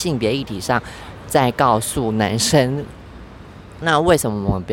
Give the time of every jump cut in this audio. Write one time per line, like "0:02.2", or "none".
0:03.8